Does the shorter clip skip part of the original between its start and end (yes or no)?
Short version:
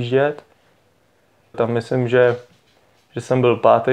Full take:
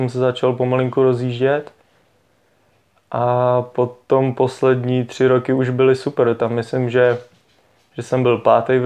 yes